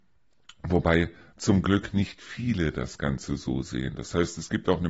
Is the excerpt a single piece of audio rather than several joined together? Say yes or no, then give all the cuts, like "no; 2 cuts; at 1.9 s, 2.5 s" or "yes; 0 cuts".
yes; 0 cuts